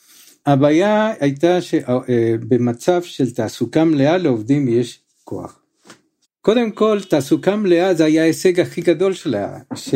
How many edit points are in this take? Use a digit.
1